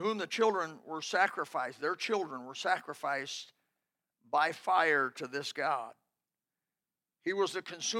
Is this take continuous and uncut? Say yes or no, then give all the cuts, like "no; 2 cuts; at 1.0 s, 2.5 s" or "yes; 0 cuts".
yes; 0 cuts